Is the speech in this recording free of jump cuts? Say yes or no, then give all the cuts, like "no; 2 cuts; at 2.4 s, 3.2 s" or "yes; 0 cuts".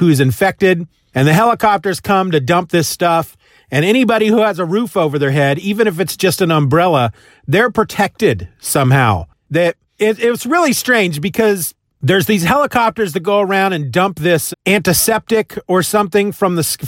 no; 2 cuts; at 9.4 s, 14.5 s